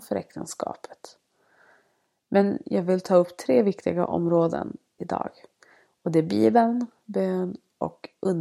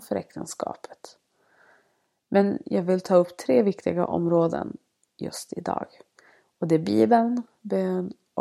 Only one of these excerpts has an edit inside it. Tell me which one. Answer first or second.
first